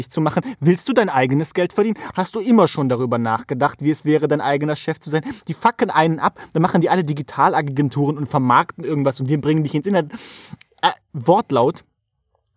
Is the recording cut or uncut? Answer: uncut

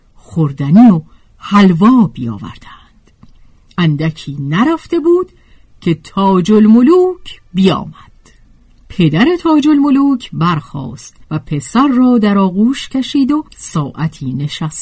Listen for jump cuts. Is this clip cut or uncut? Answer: cut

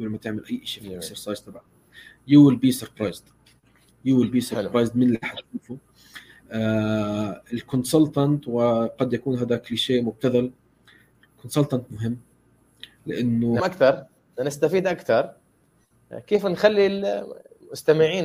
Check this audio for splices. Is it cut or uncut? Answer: cut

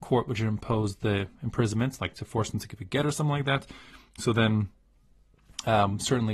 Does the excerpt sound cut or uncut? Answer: uncut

